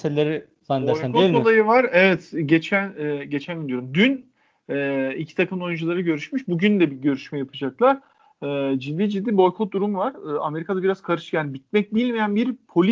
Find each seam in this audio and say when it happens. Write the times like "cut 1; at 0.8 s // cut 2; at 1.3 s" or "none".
none